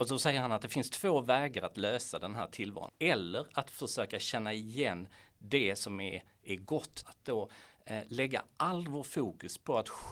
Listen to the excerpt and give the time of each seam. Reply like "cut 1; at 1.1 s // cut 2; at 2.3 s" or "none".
cut 1; at 2.9 s // cut 2; at 7.0 s